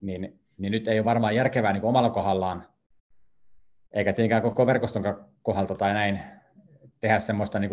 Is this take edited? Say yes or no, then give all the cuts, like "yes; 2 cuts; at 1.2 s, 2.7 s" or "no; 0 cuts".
no; 0 cuts